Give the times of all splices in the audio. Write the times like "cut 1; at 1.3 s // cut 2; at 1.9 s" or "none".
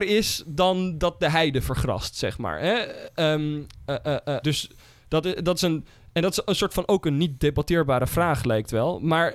cut 1; at 4.4 s